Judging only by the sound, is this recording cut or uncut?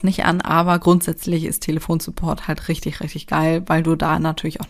uncut